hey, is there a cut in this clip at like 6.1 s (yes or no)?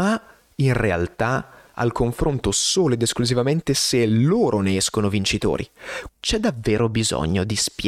yes